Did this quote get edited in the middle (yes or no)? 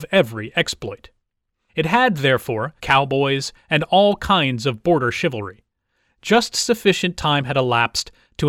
yes